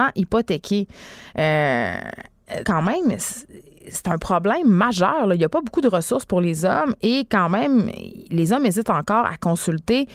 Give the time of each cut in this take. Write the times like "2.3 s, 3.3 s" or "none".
2.6 s

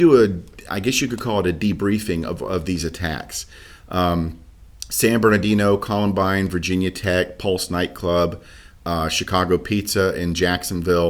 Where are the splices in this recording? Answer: none

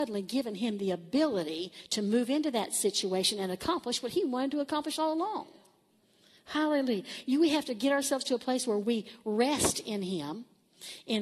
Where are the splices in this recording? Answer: none

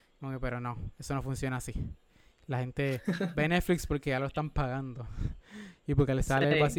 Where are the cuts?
none

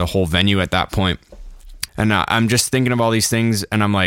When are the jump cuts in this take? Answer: 1.9 s

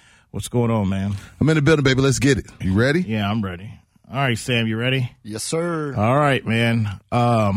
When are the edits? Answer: 2.6 s

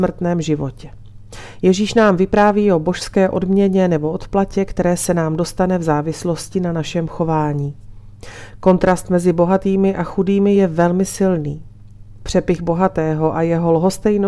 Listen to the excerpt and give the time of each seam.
none

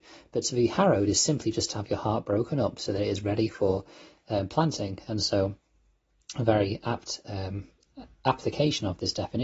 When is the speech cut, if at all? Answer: none

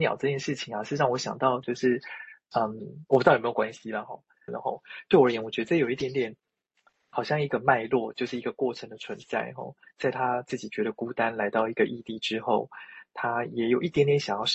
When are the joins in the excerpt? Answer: 1.6 s, 4.5 s

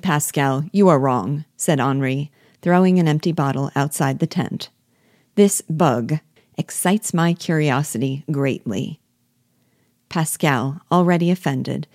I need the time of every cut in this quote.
6.4 s

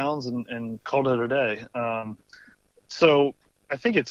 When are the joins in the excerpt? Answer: none

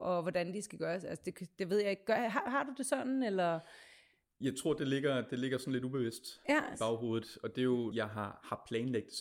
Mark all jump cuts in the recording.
6.7 s, 7.9 s

